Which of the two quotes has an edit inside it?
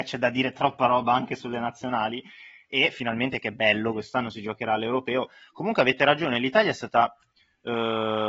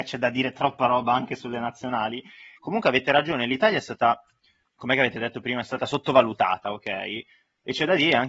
second; 2 cuts; at 2.6 s, 4.6 s

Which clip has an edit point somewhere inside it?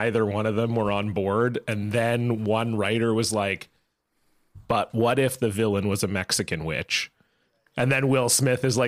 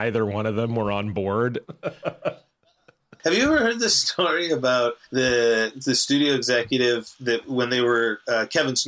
second; 2 cuts; at 1.6 s, 5.0 s

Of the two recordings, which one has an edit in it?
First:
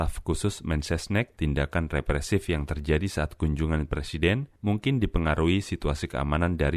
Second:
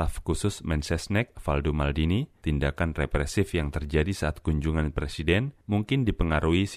first; 1 cut; at 1.3 s

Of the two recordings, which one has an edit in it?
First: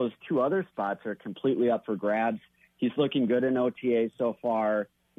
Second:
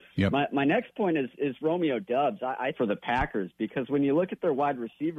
second; 1 cut; at 2.7 s

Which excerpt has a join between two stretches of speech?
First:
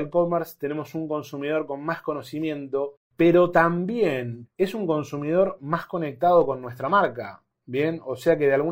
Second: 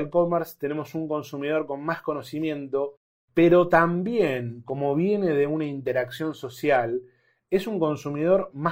first; 2 cuts; at 3.0 s, 4.4 s

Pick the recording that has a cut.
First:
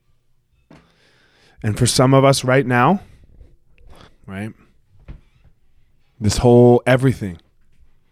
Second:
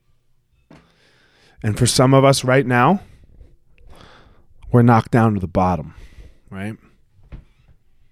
first; 1 cut; at 4.1 s

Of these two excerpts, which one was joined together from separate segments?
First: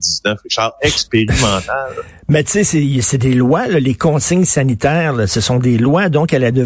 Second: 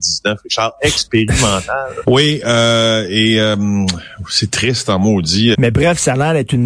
second; 2 cuts; at 2.0 s, 5.5 s

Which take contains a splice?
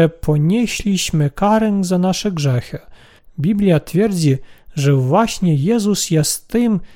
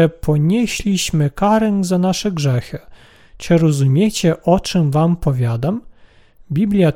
first; 1 cut; at 3.2 s

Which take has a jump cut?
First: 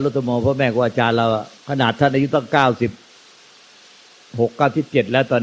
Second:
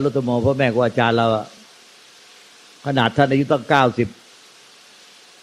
first; 1 cut; at 1.6 s

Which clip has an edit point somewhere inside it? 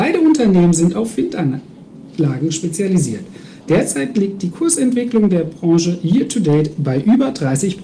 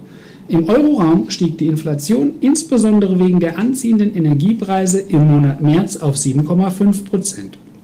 first; 1 cut; at 3.6 s

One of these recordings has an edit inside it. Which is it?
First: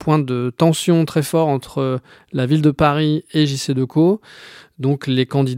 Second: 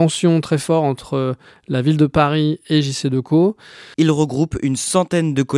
second; 1 cut; at 3.9 s

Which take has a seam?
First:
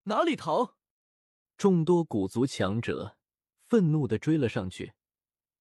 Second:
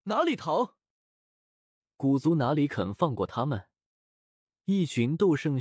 first; 1 cut; at 1.4 s

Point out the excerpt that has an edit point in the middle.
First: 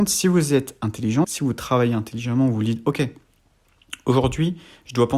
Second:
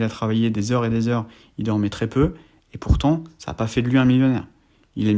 first; 1 cut; at 1.2 s

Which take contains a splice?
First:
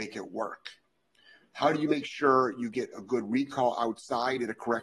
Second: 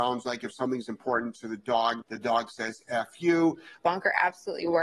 second; 2 cuts; at 2.0 s, 3.8 s

